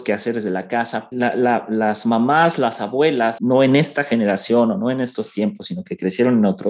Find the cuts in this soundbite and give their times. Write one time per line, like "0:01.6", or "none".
0:01.1
0:03.4